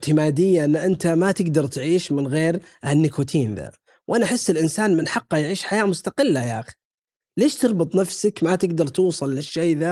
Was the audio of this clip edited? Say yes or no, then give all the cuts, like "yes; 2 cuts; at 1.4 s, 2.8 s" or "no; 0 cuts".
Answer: no; 0 cuts